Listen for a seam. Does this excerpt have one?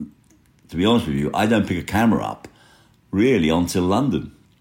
no; 0 cuts

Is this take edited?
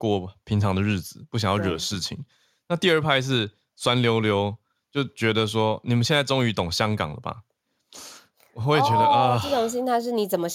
no; 0 cuts

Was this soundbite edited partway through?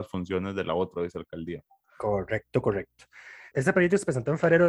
yes; 1 cut; at 3.5 s

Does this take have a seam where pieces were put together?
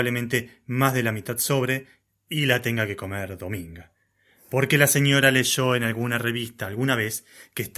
no; 0 cuts

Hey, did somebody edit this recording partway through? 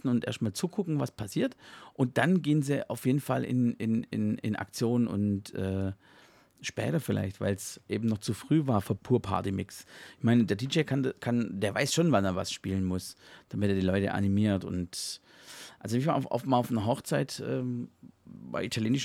yes; 1 cut; at 9.0 s

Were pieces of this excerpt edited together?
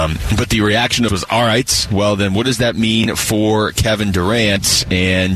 yes; 1 cut; at 1.1 s

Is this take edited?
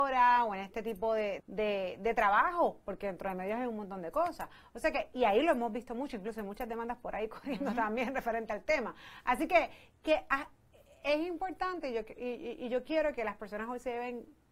yes; 1 cut; at 1.4 s

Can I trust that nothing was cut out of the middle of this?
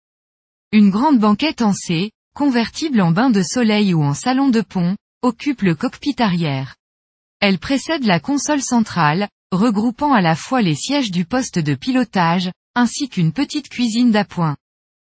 yes; 0 cuts

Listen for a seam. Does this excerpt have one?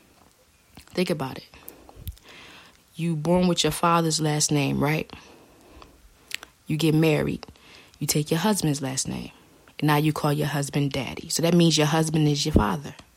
no; 0 cuts

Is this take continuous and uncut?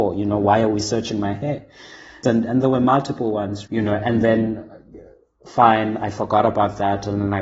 no; 2 cuts; at 2.2 s, 3.7 s

